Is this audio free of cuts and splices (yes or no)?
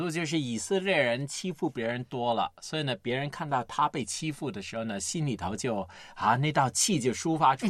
yes